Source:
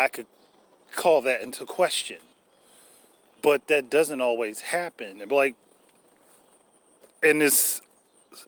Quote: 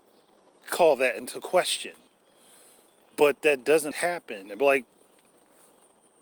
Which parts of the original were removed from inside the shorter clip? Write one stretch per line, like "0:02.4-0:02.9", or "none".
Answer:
0:04.2-0:04.6